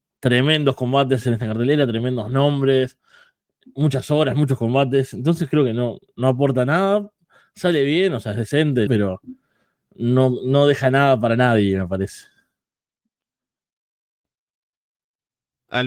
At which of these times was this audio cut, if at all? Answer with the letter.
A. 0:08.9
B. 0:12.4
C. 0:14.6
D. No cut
A